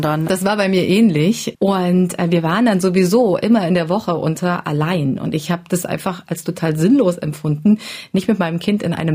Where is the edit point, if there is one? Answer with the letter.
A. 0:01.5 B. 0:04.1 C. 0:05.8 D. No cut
A